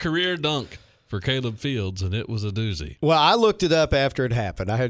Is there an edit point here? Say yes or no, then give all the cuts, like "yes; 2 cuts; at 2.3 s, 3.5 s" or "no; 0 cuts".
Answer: no; 0 cuts